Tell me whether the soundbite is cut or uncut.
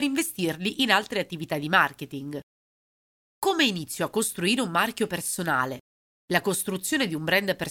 uncut